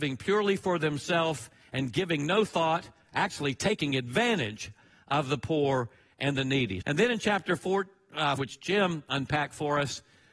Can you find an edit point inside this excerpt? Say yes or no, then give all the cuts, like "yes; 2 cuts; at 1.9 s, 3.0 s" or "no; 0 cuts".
yes; 2 cuts; at 6.8 s, 8.4 s